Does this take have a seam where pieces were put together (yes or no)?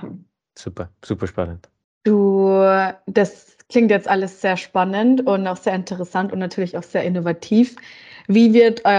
yes